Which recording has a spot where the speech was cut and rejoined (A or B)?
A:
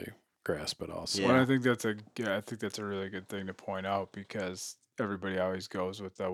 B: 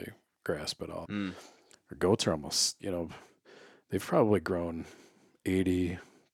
B